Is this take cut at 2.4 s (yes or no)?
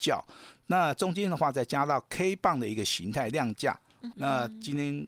no